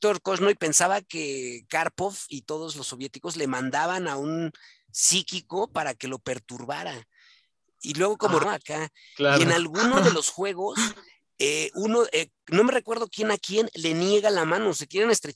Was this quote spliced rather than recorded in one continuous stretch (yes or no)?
yes